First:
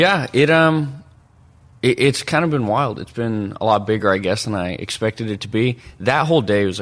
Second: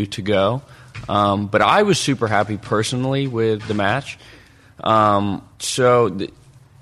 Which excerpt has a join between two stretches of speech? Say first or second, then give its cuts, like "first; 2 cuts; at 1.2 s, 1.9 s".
second; 1 cut; at 5.5 s